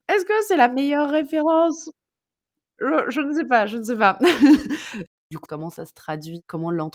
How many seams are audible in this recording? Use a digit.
1